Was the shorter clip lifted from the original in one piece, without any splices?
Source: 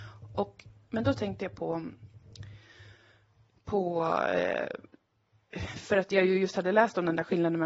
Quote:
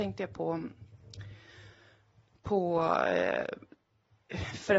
yes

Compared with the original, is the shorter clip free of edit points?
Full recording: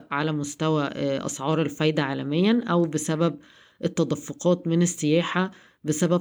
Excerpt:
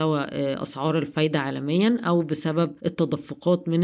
no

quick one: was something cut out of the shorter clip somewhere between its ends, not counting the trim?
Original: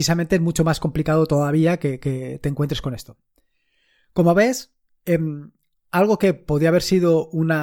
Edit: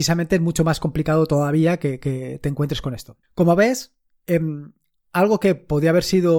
yes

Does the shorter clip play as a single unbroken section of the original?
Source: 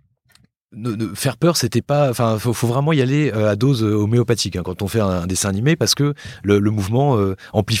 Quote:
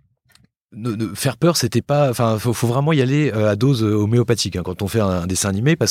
yes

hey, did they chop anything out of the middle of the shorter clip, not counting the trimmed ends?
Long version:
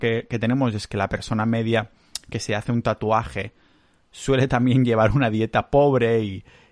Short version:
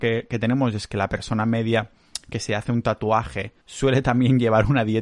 yes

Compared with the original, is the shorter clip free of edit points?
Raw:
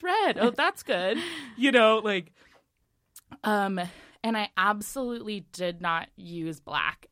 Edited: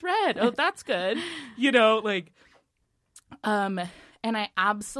yes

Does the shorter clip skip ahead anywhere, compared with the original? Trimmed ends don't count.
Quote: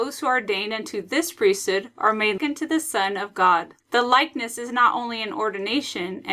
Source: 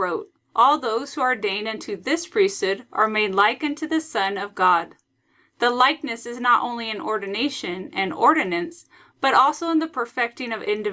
yes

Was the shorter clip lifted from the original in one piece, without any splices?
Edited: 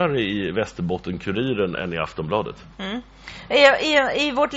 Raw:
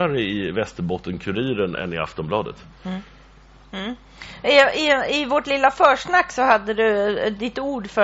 no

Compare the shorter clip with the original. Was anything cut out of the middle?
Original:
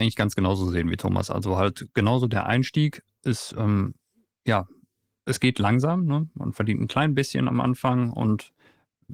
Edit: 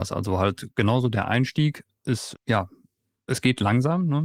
yes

